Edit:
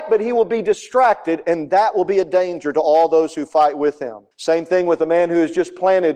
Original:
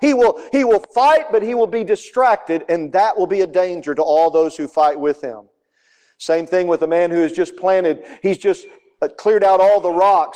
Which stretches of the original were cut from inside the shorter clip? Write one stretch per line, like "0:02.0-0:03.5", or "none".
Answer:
0:05.5-0:06.1